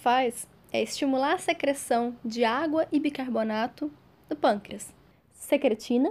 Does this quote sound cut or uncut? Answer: cut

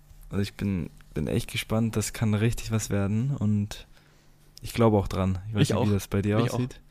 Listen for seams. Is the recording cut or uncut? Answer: uncut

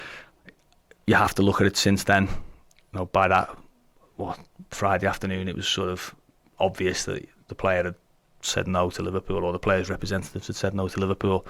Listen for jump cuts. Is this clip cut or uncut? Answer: uncut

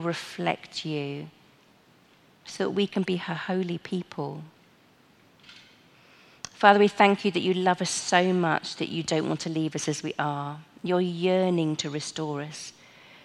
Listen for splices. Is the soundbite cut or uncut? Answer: uncut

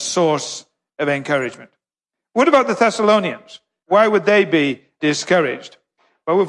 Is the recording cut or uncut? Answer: uncut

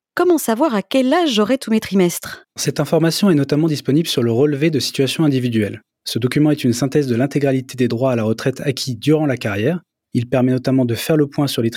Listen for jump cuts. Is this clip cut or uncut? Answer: uncut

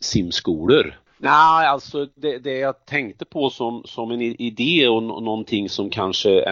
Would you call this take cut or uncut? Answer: cut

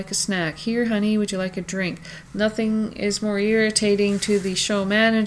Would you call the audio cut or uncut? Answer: cut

